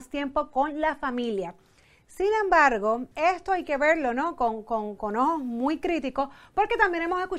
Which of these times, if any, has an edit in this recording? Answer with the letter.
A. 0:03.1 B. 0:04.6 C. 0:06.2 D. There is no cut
A